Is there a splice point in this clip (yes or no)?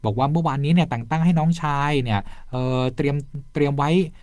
no